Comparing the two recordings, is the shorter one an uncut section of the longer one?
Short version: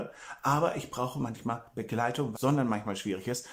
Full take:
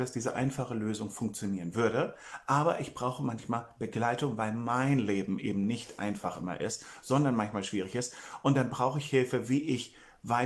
no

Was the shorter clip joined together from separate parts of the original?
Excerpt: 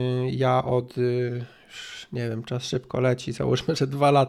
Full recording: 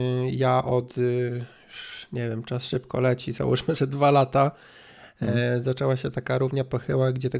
no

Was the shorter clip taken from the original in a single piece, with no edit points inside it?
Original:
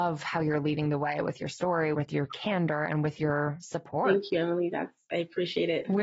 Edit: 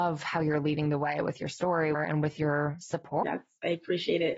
no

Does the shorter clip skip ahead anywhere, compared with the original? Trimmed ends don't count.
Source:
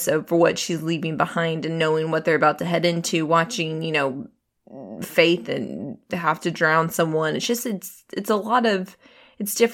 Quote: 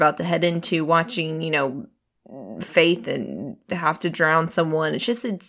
no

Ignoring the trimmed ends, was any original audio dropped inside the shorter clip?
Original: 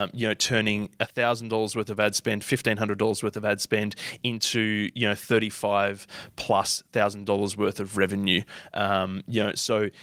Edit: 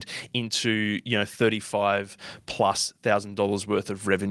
no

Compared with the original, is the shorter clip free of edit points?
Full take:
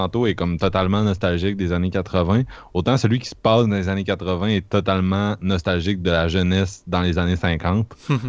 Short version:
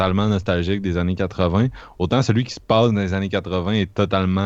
yes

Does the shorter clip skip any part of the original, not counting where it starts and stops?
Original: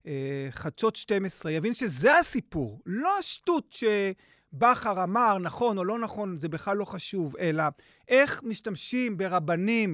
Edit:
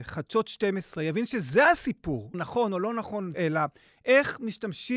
yes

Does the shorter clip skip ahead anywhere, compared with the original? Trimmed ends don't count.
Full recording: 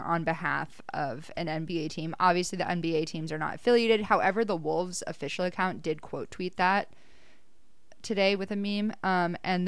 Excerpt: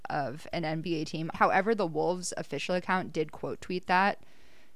yes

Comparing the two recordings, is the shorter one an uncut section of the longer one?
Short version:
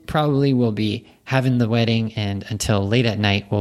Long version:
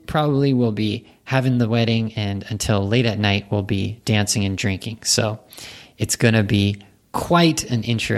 yes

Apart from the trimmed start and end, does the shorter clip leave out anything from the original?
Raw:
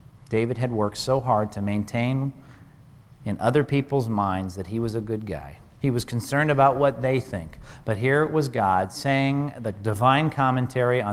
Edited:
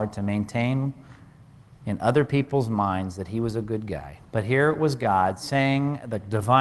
yes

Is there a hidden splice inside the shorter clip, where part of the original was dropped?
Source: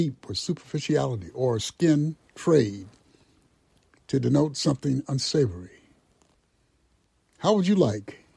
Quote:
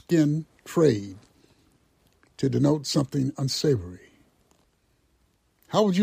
no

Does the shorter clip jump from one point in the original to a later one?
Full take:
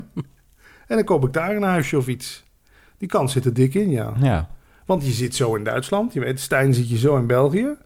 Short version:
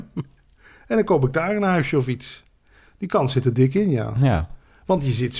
no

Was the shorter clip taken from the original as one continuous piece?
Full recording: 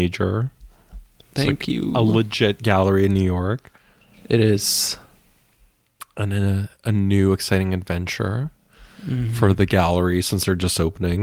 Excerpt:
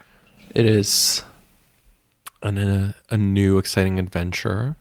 yes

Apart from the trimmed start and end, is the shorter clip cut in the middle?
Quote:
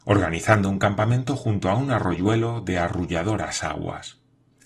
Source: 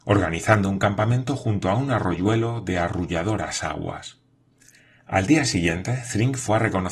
no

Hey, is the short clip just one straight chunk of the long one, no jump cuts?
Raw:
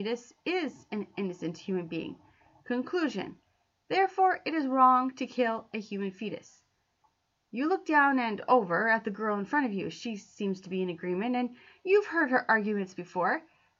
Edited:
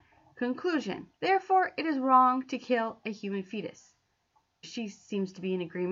no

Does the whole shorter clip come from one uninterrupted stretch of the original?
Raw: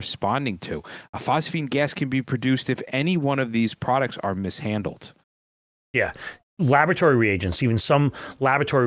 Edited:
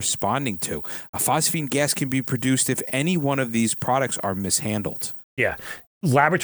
no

